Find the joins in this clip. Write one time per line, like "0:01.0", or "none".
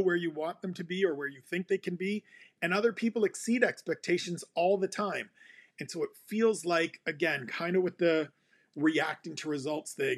none